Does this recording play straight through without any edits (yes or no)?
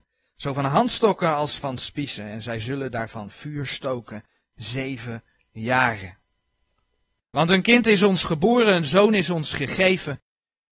no